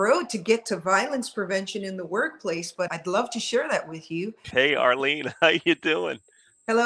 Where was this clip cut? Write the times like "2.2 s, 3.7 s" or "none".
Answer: 2.9 s, 4.4 s